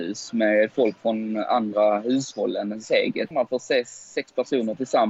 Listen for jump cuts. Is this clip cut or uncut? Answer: cut